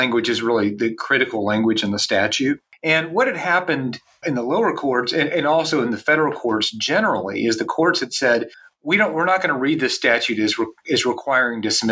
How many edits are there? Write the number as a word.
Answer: one